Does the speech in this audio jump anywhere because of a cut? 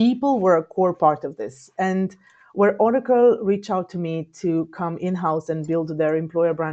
no; 0 cuts

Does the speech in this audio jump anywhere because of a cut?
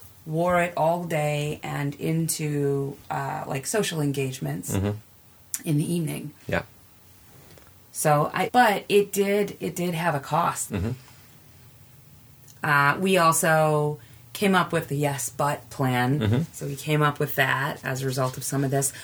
yes; 3 cuts; at 8.5 s, 10.7 s, 14.9 s

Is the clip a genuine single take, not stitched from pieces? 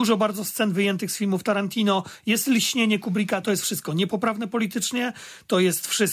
no; 1 cut; at 3.4 s

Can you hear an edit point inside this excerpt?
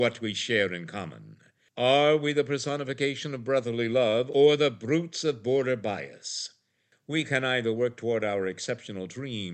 no; 0 cuts

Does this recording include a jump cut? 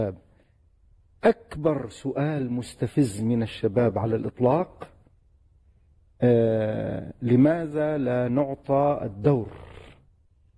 no; 0 cuts

